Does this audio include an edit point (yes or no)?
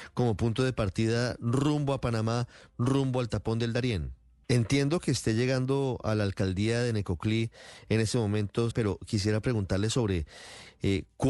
yes